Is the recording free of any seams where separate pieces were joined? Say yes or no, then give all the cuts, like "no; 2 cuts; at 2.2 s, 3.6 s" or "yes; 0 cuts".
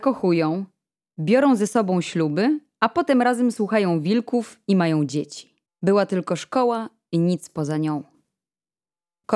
no; 1 cut; at 5.8 s